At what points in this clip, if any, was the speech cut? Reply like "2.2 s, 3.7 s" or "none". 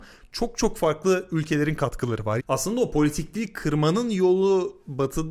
2.4 s